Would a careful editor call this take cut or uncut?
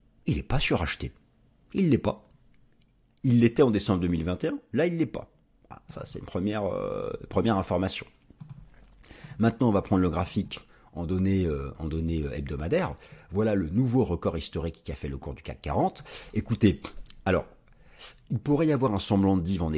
uncut